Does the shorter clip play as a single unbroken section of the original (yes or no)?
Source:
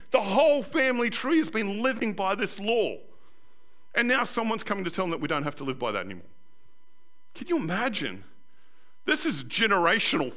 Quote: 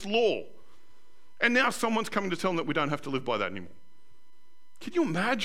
yes